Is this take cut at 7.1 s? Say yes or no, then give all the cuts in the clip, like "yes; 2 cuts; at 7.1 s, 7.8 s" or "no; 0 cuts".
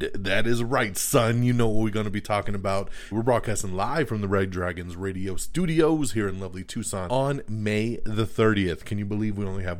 yes; 2 cuts; at 3.1 s, 7.1 s